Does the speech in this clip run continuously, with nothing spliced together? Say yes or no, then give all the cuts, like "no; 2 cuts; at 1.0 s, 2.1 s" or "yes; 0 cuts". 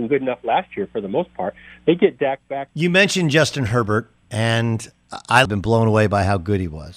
no; 2 cuts; at 2.7 s, 5.5 s